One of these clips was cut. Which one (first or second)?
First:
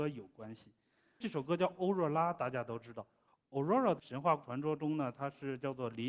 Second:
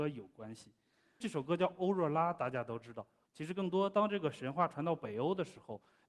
second